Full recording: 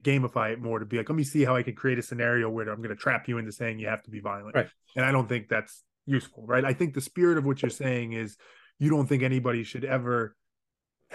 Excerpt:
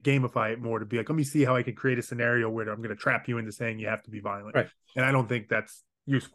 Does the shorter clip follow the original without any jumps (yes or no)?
yes